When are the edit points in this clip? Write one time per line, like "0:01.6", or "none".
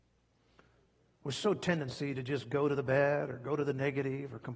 0:01.0